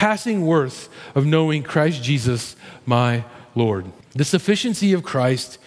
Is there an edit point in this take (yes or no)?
yes